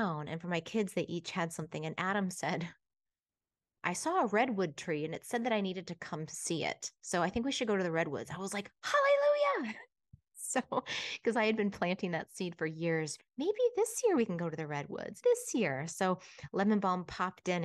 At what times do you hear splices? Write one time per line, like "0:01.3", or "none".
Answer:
0:13.2
0:15.2